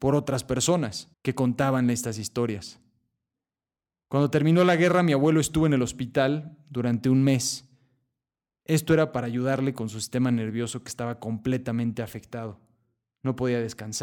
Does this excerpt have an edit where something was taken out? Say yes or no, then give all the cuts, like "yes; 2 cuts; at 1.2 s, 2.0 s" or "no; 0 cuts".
yes; 1 cut; at 1.1 s